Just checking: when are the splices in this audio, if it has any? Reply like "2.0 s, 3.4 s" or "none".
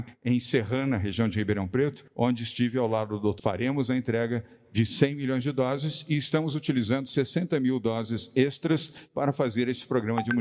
3.4 s